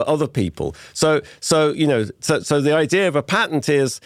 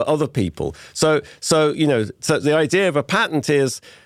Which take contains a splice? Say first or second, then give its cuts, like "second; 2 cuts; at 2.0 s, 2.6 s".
second; 1 cut; at 2.4 s